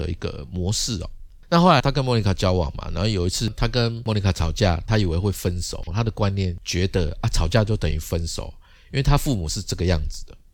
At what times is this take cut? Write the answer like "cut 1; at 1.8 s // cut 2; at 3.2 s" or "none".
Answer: cut 1; at 1.8 s // cut 2; at 4.8 s // cut 3; at 5.9 s

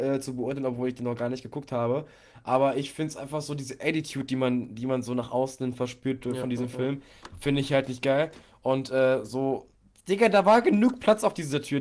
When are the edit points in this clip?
none

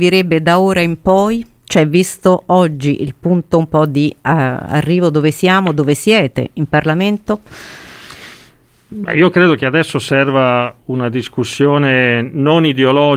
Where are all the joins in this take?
none

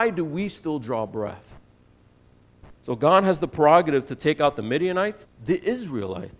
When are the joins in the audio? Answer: cut 1; at 2.8 s // cut 2; at 5.2 s

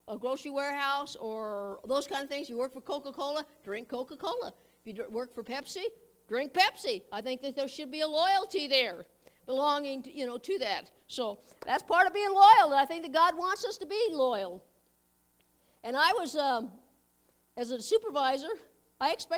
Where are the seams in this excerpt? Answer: none

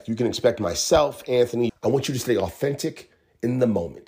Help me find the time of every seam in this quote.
cut 1; at 1.7 s

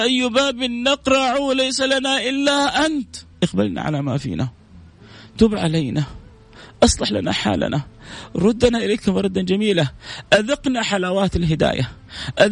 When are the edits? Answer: cut 1; at 3.3 s

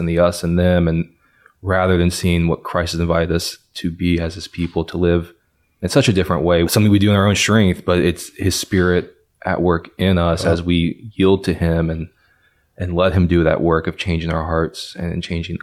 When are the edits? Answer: cut 1; at 6.6 s

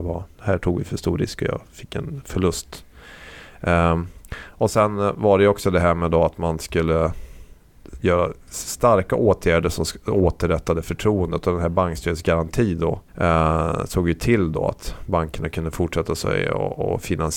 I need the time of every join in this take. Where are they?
cut 1; at 13.1 s

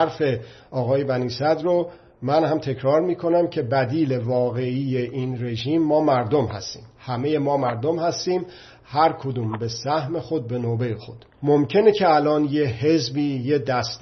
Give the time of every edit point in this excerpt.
cut 1; at 6.9 s // cut 2; at 11.3 s

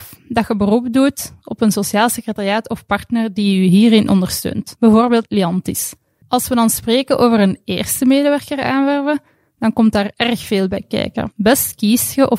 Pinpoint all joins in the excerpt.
cut 1; at 6.2 s

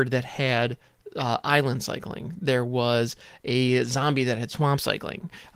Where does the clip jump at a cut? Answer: none

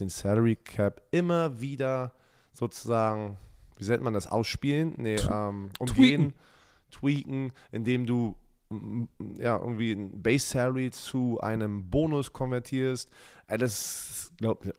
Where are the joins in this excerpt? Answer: none

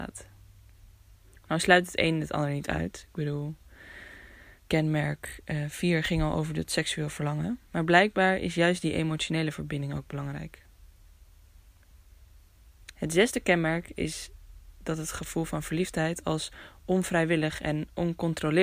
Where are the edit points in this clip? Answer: cut 1; at 4.6 s // cut 2; at 7.7 s // cut 3; at 12.9 s

